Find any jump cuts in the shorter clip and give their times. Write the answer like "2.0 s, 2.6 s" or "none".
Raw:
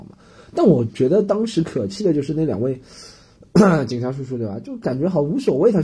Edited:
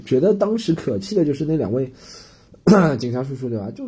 none